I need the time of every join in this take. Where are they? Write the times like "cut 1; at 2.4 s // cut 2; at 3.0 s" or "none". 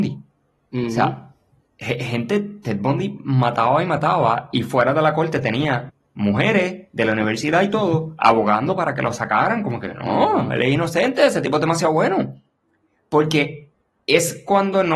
none